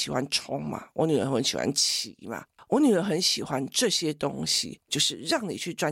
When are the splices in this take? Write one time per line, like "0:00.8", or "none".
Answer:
0:04.9

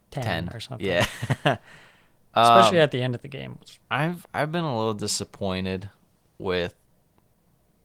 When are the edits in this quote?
0:03.8

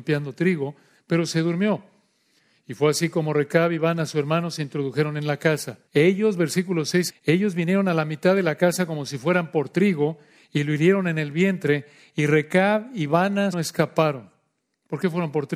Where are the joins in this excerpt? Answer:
0:05.9
0:07.1
0:13.5

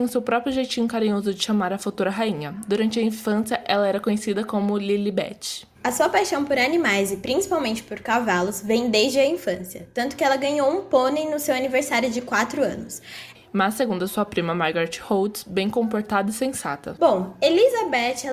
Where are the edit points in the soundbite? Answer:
0:05.7
0:13.3
0:17.0

